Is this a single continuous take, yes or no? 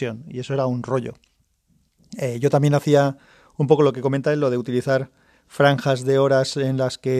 yes